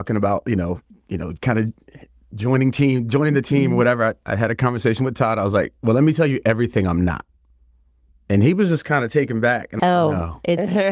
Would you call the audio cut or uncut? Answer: cut